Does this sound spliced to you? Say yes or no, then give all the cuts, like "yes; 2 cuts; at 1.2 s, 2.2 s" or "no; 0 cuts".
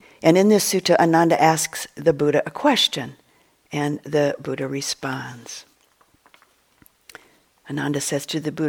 no; 0 cuts